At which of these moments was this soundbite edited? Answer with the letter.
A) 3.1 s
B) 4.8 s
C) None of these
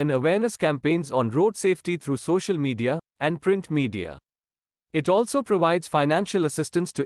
A